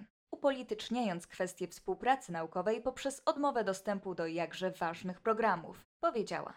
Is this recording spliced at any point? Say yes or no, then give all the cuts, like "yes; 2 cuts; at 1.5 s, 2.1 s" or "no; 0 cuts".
no; 0 cuts